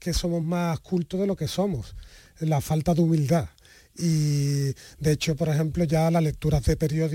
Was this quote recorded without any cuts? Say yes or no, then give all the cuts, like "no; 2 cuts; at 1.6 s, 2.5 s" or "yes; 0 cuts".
yes; 0 cuts